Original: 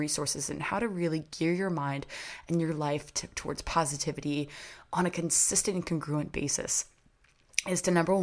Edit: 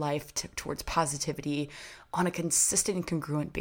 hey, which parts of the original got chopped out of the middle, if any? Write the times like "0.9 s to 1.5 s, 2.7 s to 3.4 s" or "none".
none